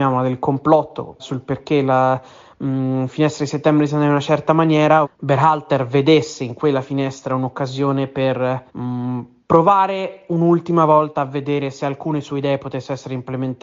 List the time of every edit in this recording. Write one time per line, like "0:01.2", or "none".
0:01.2
0:05.0
0:08.7